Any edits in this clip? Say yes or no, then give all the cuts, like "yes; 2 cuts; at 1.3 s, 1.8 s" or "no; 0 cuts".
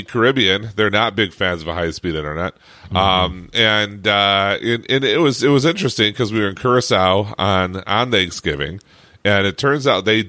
no; 0 cuts